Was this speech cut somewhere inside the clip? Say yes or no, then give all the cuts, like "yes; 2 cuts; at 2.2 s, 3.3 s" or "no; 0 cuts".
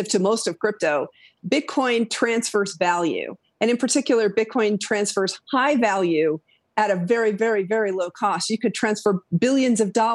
no; 0 cuts